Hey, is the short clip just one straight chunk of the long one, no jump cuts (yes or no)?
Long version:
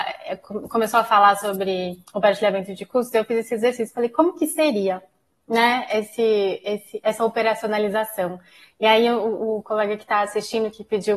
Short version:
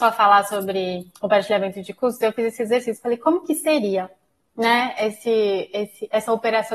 yes